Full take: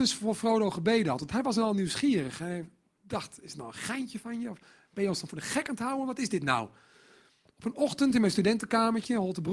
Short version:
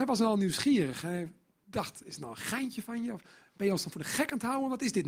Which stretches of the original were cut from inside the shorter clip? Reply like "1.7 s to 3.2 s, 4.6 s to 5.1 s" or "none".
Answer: none